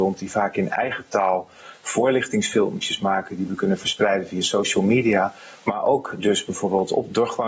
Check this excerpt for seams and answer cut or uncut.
uncut